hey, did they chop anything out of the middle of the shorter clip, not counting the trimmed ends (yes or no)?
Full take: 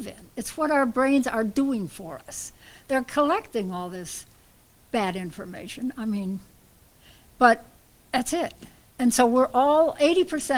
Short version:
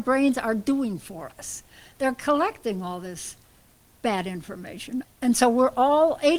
yes